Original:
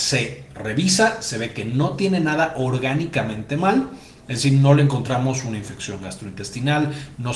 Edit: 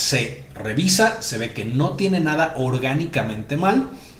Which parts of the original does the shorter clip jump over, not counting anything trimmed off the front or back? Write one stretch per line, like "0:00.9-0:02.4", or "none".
none